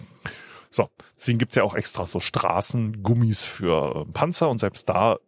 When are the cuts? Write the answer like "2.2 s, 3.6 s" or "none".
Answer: none